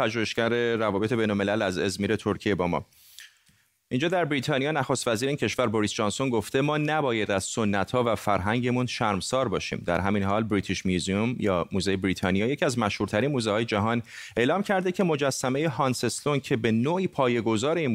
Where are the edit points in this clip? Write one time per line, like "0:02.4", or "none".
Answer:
none